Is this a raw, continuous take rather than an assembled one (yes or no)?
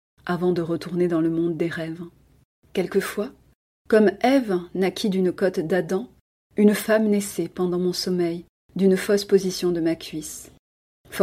yes